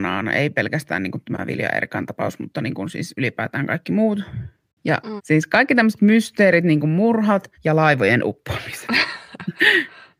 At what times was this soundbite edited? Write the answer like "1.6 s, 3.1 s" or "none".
5.2 s, 7.5 s